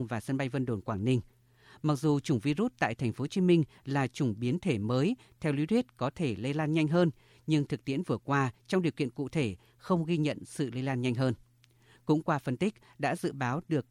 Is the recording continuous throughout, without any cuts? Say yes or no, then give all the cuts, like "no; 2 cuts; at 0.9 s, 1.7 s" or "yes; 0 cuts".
yes; 0 cuts